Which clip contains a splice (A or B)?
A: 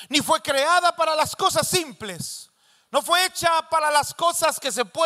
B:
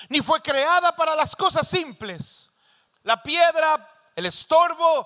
B